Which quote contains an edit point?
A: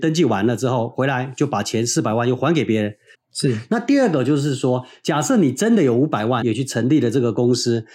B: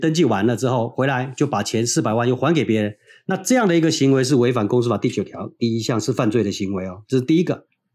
A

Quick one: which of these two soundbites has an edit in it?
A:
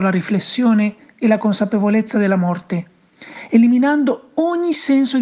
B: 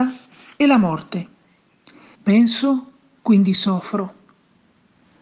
B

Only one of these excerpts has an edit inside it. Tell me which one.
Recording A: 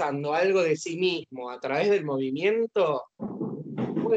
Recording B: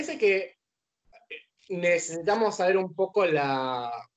A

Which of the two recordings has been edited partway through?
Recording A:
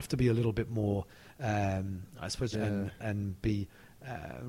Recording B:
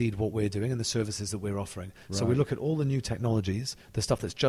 A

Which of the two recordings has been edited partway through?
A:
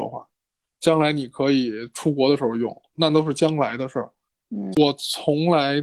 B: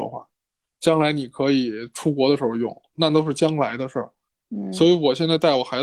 A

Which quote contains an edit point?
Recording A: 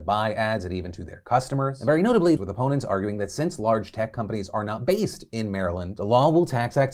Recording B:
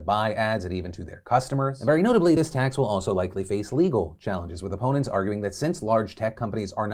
A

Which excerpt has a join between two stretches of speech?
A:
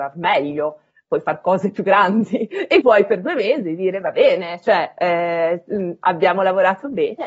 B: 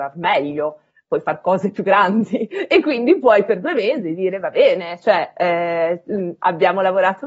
A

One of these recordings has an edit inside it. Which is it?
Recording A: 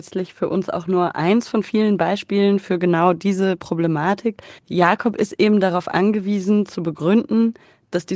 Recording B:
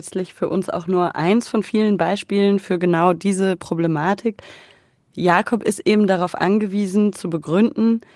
A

